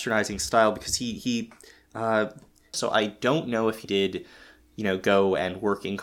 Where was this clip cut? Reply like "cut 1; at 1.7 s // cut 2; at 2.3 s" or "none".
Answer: cut 1; at 2.7 s // cut 2; at 3.8 s